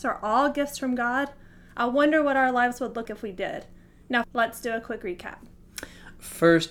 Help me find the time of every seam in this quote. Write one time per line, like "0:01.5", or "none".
0:03.1
0:04.2